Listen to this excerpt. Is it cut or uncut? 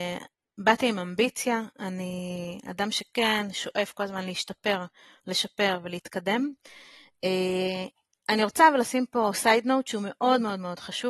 uncut